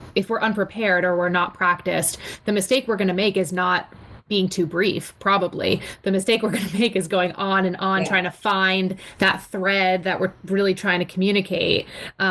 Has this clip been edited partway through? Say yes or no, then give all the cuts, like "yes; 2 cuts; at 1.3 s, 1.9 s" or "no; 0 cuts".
no; 0 cuts